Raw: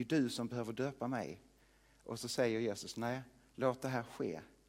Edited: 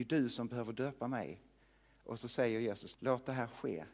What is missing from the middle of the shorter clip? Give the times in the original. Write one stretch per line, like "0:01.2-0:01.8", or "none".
0:02.9-0:03.5